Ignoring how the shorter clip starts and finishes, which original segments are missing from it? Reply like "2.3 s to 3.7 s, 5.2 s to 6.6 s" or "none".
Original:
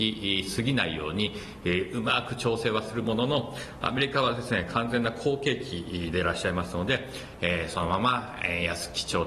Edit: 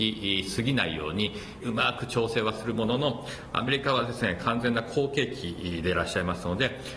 1.6 s to 1.9 s